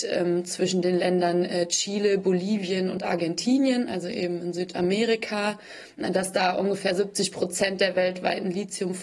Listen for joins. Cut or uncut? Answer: uncut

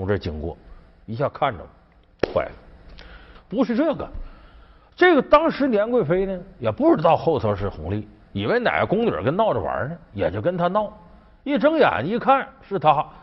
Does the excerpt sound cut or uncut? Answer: cut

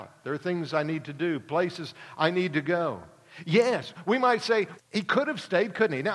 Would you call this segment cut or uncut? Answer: cut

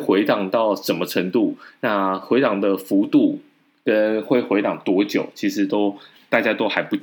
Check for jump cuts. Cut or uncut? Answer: uncut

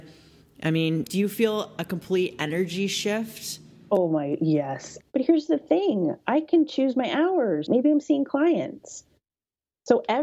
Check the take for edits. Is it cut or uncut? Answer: cut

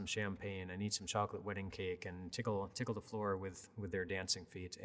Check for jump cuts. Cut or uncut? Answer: uncut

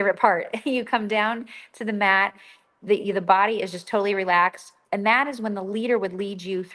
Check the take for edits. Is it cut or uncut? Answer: cut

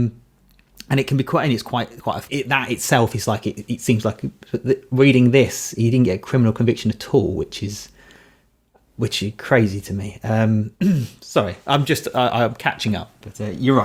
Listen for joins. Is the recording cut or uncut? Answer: cut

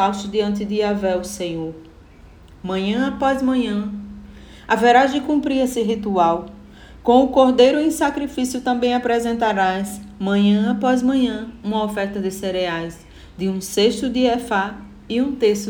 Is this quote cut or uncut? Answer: uncut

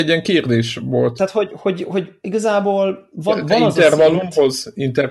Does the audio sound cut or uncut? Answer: uncut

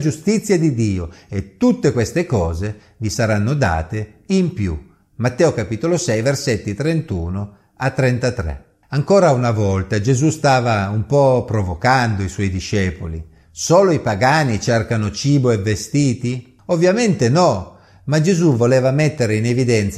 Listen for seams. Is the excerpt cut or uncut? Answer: uncut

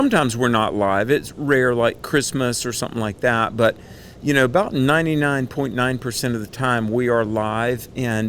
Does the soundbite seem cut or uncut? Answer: uncut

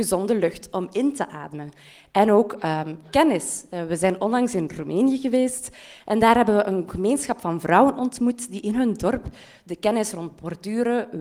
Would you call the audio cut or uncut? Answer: uncut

